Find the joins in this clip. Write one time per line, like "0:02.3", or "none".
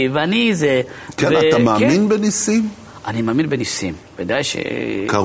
none